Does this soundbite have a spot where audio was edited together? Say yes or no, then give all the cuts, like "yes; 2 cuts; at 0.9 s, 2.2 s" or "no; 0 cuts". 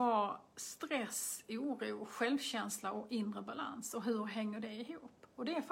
no; 0 cuts